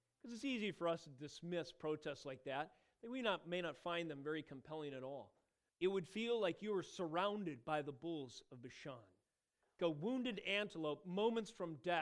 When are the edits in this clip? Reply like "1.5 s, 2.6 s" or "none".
5.7 s, 9.8 s

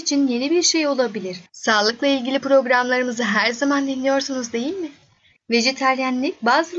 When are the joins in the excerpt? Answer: 1.5 s, 5.3 s

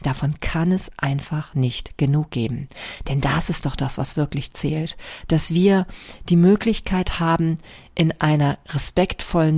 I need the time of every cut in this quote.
none

